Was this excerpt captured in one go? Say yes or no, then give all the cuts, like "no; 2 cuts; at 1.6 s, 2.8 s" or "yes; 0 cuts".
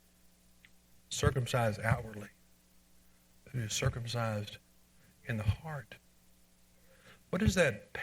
yes; 0 cuts